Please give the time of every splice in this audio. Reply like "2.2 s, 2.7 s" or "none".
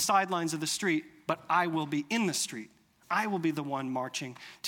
3.0 s